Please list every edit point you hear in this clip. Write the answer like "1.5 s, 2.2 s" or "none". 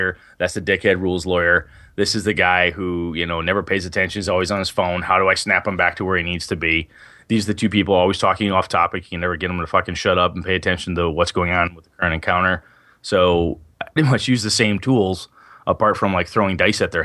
14.0 s